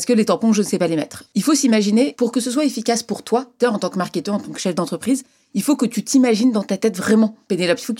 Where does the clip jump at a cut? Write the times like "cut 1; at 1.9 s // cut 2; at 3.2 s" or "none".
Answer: cut 1; at 1.2 s // cut 2; at 3.6 s

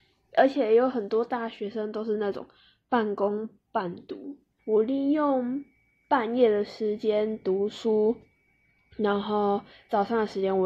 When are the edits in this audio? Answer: cut 1; at 4.6 s

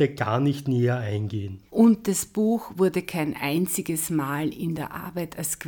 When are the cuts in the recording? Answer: cut 1; at 1.7 s

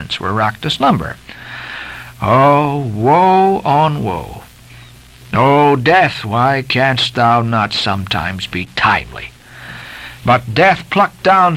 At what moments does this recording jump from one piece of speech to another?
cut 1; at 10.2 s

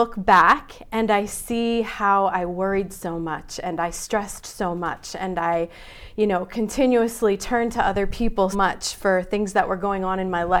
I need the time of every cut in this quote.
cut 1; at 8.5 s

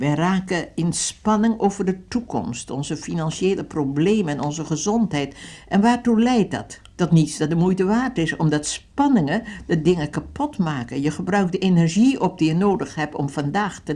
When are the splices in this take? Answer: cut 1; at 6.9 s

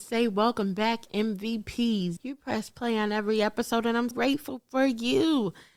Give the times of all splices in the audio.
cut 1; at 2.2 s // cut 2; at 4.1 s

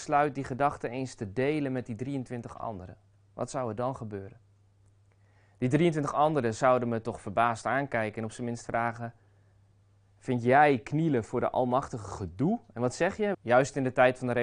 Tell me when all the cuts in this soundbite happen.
cut 1; at 13.3 s

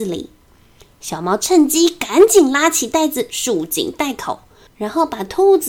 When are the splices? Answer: none

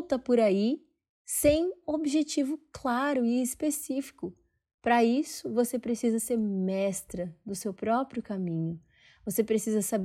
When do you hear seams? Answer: cut 1; at 1.8 s

